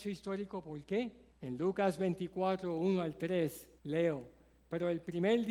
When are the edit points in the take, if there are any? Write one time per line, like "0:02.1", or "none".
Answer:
0:01.3
0:03.8